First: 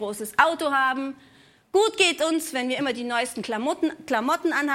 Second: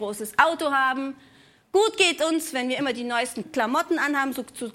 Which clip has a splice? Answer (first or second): second